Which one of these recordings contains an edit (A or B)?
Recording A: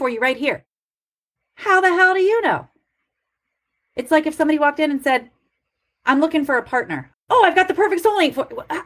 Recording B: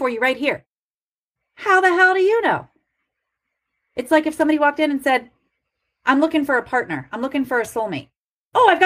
A